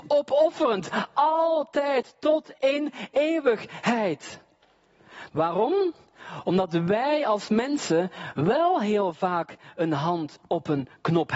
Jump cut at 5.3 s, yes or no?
yes